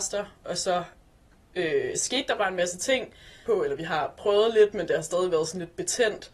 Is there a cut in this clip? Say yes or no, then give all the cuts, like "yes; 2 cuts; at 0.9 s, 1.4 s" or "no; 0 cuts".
yes; 1 cut; at 3.5 s